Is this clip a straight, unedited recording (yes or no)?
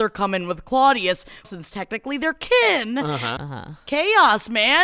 no